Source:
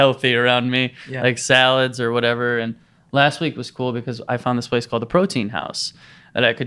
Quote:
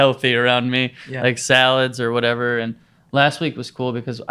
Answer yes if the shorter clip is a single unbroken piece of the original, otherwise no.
yes